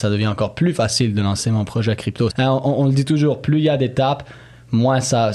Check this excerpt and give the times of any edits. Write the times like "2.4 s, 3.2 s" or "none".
2.3 s